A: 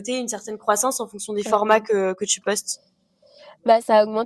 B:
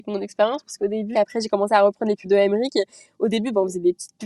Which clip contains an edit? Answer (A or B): B